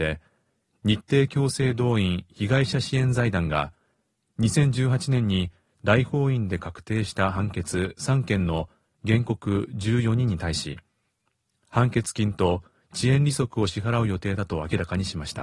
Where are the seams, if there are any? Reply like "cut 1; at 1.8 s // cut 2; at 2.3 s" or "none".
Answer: none